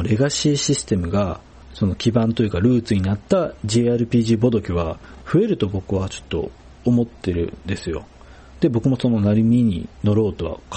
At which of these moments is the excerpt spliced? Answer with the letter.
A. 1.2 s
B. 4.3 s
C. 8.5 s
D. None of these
D